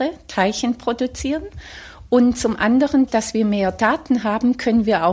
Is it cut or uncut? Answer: cut